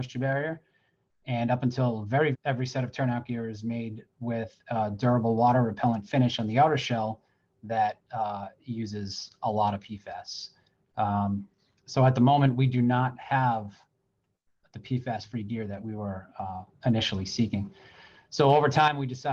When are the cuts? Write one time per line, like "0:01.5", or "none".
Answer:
0:02.3